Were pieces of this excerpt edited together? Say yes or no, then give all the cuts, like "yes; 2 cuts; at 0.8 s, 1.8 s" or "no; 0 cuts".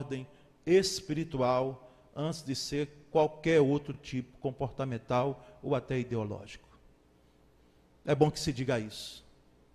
no; 0 cuts